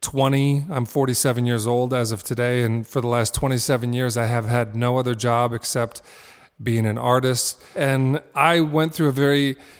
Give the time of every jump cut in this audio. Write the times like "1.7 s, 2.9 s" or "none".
7.7 s